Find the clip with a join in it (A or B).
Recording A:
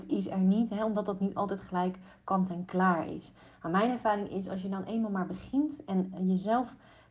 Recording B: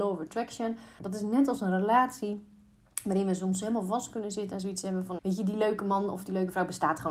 B